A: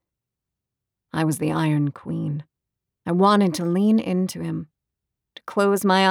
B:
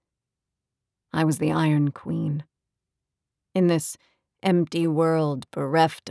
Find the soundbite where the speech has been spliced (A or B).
A